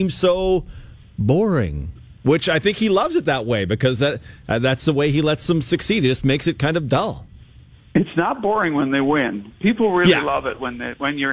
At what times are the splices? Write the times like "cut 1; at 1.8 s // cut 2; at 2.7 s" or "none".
none